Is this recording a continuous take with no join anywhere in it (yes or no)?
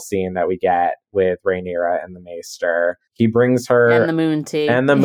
yes